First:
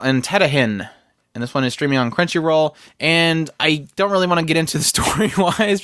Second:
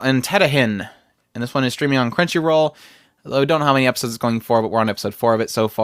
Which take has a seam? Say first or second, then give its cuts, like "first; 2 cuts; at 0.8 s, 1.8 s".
first; 1 cut; at 2.8 s